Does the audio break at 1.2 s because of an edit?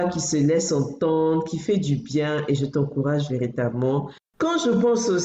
no; 1 cut; at 4.2 s

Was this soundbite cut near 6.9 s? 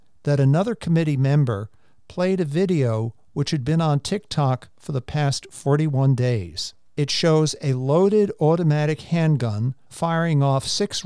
yes; 2 cuts; at 6.9 s, 9.8 s

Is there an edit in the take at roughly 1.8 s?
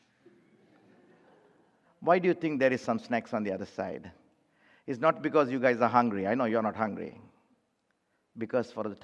yes; 1 cut; at 1.8 s

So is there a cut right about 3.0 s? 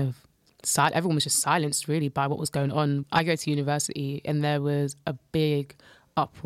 yes; 1 cut; at 3.0 s

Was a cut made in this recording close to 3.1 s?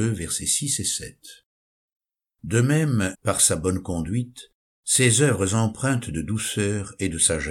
yes; 1 cut; at 3.1 s

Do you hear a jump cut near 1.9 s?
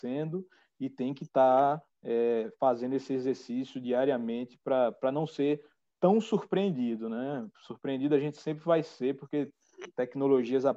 no; 0 cuts

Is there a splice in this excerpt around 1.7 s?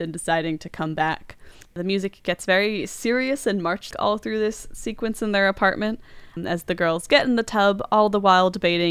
yes; 2 cuts; at 1.7 s, 3.9 s

